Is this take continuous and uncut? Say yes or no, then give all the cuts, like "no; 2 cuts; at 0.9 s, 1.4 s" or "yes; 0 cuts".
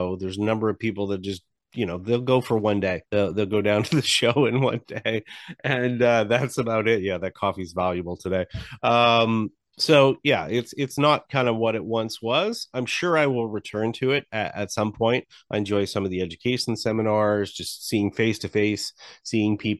no; 1 cut; at 3.1 s